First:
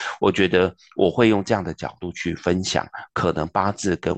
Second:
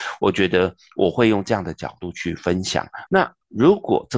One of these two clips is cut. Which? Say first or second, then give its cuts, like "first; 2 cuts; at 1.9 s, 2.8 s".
second; 1 cut; at 3.1 s